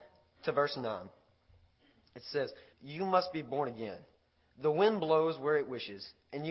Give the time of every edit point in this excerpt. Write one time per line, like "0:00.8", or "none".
0:02.7